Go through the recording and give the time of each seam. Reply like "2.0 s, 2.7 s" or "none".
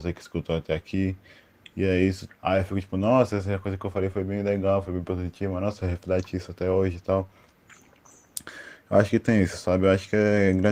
2.3 s